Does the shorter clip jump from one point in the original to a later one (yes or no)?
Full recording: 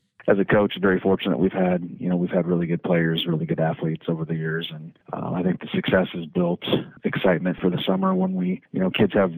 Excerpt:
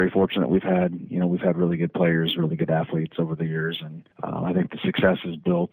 no